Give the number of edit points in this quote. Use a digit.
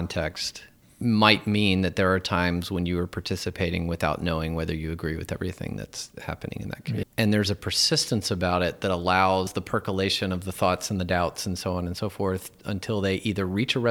1